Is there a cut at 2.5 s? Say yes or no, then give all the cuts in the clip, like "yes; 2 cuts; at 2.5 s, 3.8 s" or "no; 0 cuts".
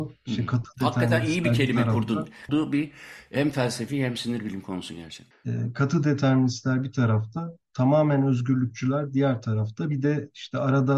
yes; 1 cut; at 2.5 s